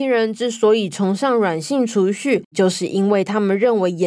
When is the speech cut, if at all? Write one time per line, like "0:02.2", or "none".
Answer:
0:02.5